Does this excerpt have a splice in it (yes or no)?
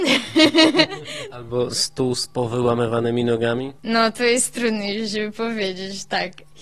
yes